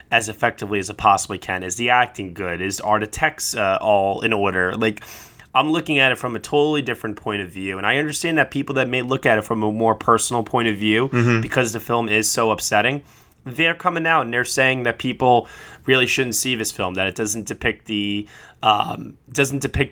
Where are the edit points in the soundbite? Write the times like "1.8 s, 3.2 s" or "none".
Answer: none